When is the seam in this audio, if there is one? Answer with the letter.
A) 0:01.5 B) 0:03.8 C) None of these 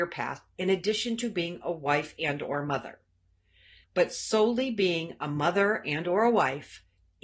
B